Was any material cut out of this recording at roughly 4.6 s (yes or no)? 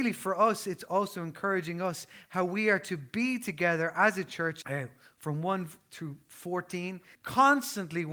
yes